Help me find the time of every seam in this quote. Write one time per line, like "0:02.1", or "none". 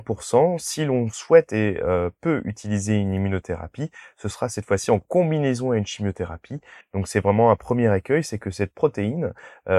0:06.8